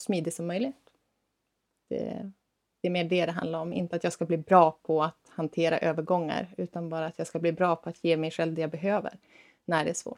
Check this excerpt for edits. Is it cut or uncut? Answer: uncut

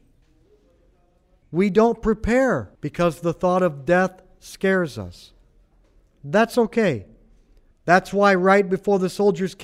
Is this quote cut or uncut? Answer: cut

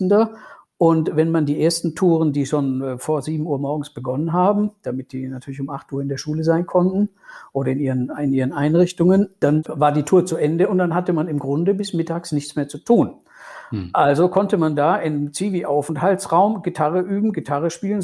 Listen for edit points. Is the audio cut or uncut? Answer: uncut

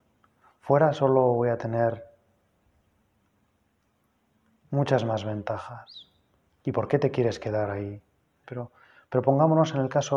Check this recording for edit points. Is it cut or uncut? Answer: cut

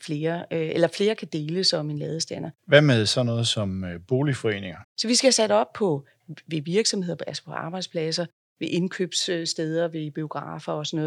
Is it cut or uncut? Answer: cut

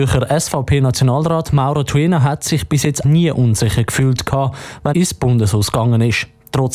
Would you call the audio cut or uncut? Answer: cut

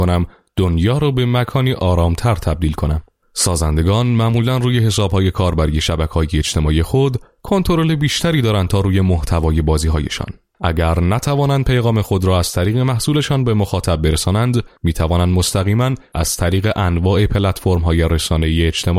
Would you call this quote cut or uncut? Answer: cut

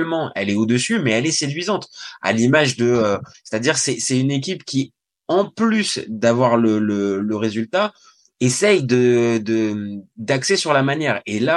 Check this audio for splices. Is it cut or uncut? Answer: cut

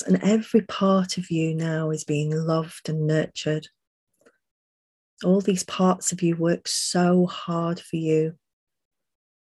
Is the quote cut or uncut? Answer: cut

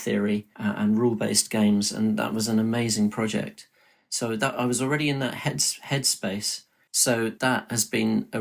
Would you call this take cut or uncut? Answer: cut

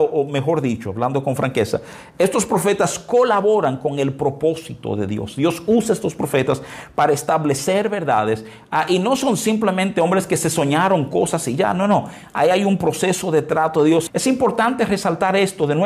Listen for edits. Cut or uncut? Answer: cut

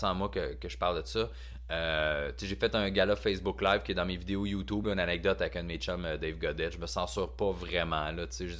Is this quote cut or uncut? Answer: uncut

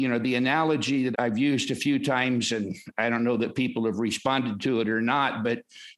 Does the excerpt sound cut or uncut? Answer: cut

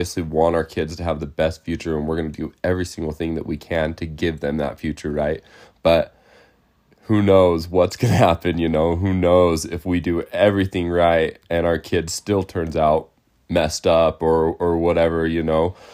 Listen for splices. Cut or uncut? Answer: uncut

